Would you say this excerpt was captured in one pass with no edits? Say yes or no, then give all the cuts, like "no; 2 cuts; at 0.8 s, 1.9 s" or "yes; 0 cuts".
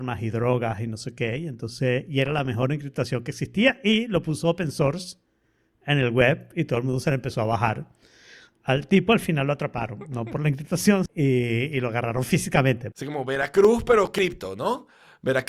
no; 2 cuts; at 11.1 s, 12.9 s